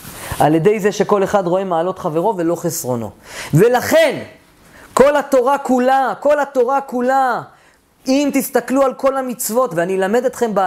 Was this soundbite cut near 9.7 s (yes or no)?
yes